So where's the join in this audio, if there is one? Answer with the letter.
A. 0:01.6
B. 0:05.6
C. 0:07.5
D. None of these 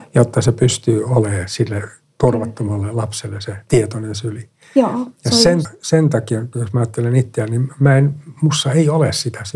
B